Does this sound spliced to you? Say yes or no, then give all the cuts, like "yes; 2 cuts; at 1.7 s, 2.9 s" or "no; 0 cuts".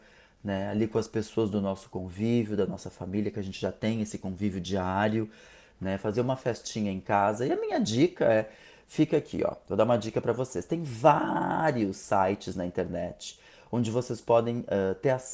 no; 0 cuts